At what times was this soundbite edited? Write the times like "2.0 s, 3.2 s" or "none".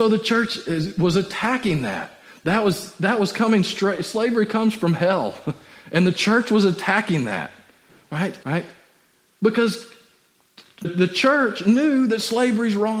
8.4 s, 10.8 s